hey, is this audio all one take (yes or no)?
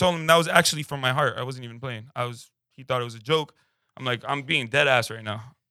yes